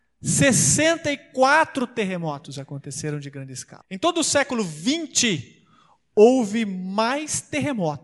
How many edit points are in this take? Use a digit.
1